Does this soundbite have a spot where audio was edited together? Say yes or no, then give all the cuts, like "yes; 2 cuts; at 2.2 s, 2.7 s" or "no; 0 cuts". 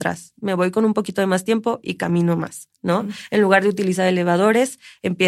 no; 0 cuts